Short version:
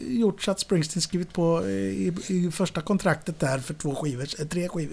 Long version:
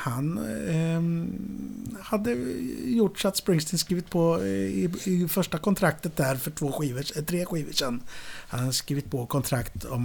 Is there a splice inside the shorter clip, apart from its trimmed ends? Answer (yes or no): no